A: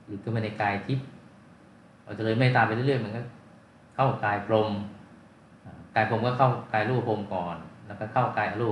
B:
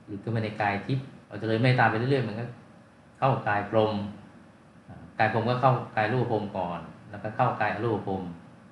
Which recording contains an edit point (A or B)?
B